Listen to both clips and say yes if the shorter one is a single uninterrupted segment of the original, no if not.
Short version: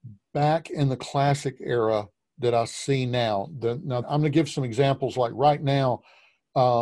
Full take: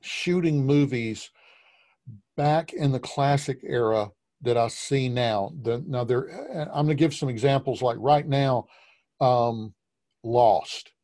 no